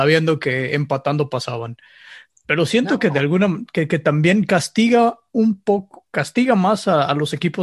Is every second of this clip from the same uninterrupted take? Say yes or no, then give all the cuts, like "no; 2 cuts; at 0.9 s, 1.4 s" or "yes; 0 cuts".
yes; 0 cuts